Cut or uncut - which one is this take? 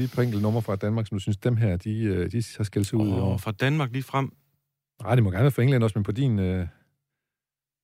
uncut